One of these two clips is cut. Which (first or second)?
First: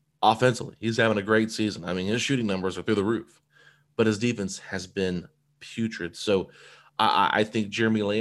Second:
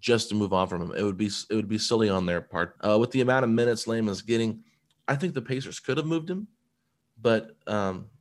second